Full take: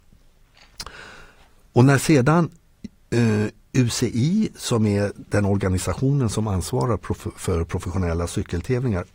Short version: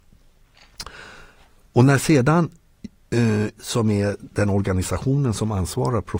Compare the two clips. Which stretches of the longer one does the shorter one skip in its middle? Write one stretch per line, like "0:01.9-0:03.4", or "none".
0:03.6-0:04.5